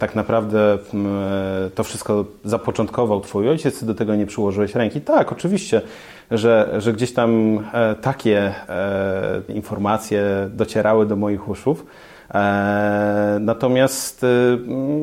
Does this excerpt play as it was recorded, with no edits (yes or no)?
no